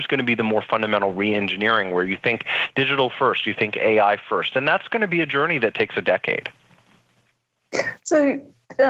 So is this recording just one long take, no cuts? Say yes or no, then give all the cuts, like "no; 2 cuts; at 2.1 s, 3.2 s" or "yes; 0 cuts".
yes; 0 cuts